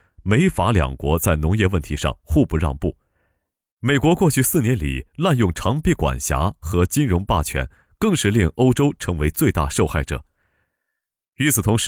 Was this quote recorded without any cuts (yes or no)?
yes